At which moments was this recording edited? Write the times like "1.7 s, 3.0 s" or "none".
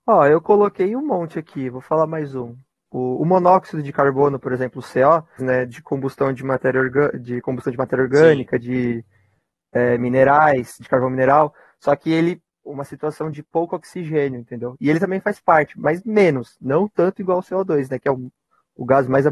5.4 s, 12.6 s

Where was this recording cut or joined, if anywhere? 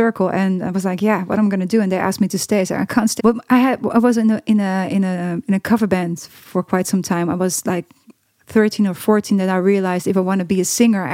3.2 s

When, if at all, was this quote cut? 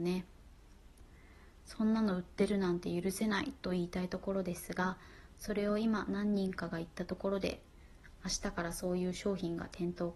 none

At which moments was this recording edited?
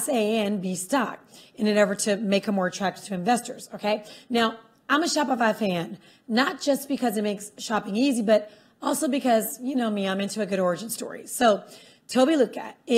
none

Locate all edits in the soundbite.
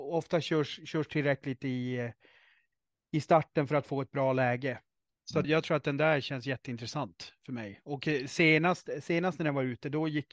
5.4 s

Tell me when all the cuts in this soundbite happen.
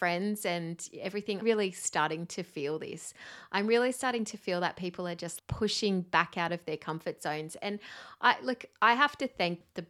1.4 s, 5.4 s

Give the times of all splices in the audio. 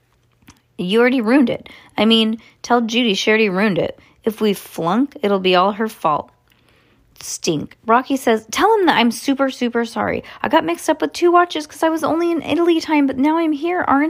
none

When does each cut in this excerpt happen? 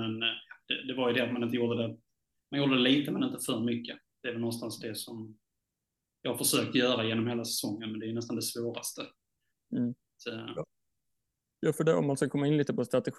none

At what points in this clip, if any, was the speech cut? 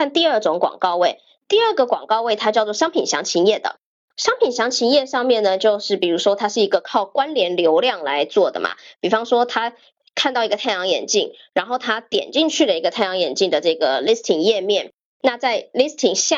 none

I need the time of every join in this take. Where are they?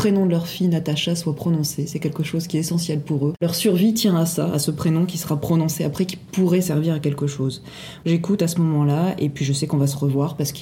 8.0 s

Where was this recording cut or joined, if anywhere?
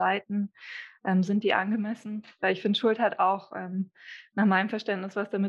none

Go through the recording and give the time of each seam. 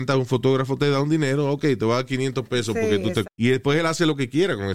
3.2 s

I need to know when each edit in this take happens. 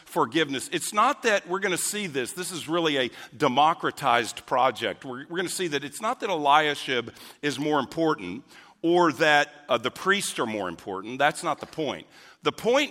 none

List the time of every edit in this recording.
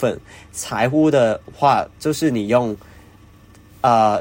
none

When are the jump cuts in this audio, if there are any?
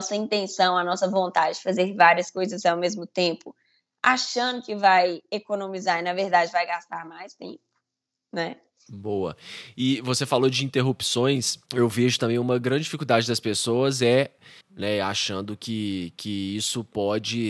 8.9 s, 11.7 s, 14.6 s

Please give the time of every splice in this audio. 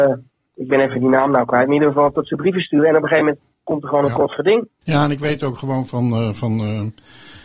4.8 s

